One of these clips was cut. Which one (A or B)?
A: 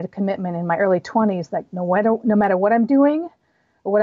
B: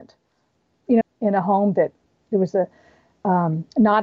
B